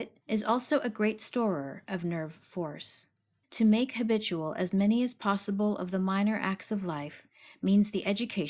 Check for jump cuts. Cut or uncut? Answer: uncut